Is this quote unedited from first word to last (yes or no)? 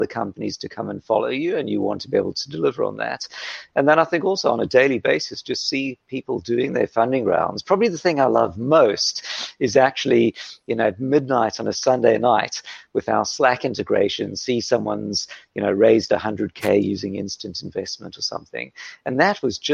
yes